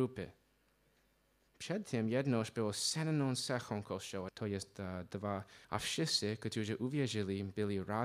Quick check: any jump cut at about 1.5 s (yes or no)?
no